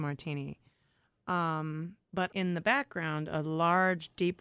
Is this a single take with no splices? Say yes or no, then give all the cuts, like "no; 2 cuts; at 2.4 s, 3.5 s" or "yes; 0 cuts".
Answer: no; 1 cut; at 2.3 s